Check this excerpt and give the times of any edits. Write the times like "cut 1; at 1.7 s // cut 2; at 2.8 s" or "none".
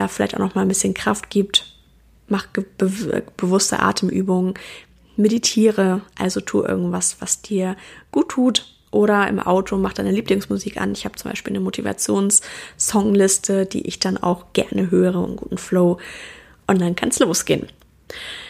cut 1; at 15.3 s